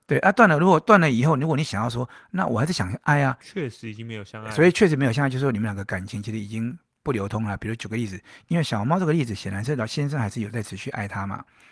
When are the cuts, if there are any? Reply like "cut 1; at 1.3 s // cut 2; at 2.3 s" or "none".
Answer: cut 1; at 3.4 s